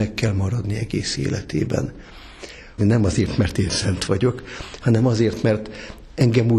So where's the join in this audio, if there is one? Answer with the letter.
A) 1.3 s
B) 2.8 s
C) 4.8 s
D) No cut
B